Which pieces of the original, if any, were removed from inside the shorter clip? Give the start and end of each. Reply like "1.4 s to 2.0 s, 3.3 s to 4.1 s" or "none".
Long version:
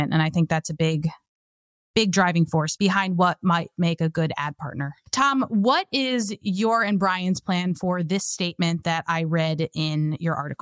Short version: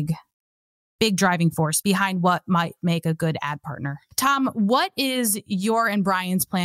none